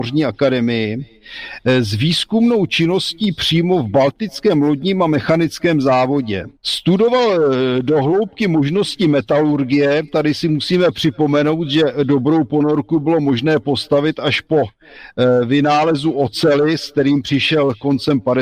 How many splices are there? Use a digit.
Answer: 1